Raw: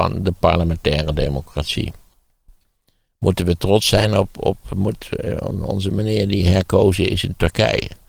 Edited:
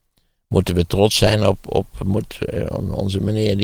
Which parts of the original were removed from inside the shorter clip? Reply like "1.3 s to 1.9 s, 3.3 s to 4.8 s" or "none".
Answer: none

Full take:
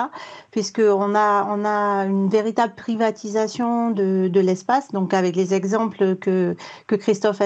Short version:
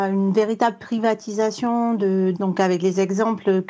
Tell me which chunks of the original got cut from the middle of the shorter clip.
4.3 s to 4.9 s

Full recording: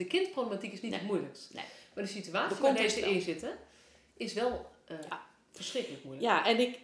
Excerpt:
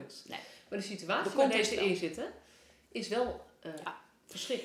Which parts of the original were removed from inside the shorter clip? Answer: none

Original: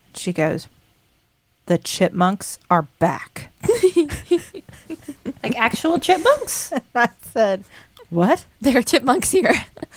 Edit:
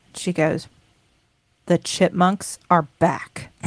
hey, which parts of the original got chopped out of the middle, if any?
none

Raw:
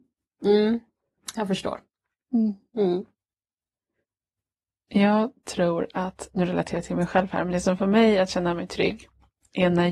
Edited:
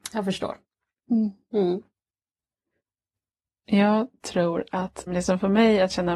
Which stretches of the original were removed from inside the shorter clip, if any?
6.3 s to 7.4 s

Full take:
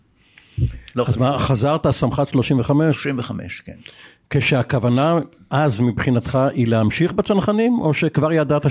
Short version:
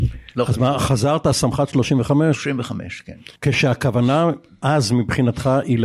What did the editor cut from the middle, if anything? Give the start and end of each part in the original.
4.0 s to 4.2 s

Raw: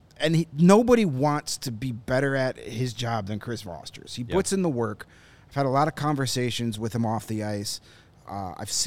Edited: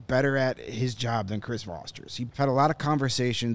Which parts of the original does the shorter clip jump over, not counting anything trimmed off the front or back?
4.3 s to 5.5 s

